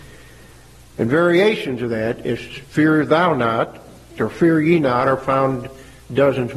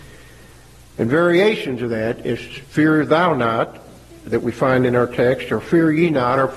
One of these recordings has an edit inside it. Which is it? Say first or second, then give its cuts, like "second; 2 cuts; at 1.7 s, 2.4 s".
first; 1 cut; at 4.2 s